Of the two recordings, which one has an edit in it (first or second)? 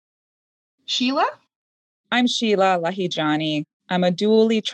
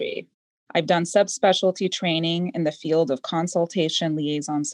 first